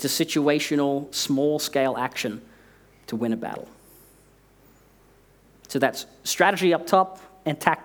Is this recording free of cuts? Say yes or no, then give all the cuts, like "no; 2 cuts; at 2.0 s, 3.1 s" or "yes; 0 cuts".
yes; 0 cuts